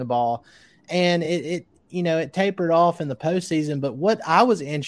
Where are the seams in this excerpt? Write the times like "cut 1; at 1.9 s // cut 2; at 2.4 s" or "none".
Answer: none